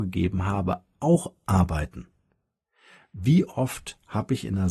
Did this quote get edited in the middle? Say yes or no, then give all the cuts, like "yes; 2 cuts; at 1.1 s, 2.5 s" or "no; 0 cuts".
no; 0 cuts